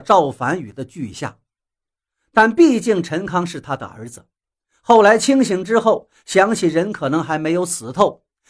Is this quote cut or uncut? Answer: uncut